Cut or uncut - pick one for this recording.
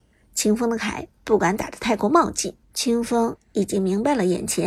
cut